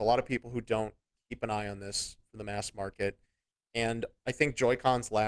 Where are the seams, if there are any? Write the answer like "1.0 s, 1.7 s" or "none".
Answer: none